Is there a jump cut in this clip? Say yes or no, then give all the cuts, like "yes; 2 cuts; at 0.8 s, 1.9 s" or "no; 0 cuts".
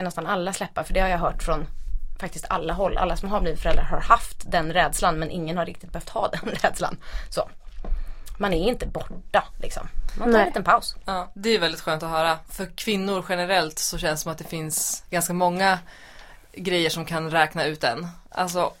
yes; 1 cut; at 12.5 s